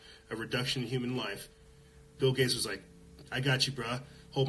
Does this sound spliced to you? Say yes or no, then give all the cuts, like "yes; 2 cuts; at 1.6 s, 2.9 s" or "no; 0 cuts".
no; 0 cuts